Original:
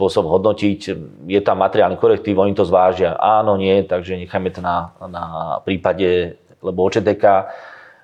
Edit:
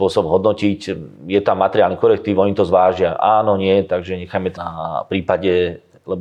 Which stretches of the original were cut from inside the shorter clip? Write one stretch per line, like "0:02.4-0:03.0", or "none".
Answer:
0:04.6-0:05.1